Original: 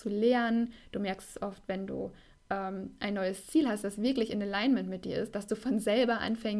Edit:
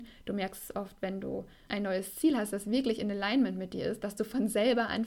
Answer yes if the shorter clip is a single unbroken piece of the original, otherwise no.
no